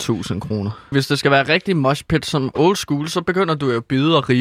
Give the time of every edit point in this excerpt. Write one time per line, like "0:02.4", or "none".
0:00.9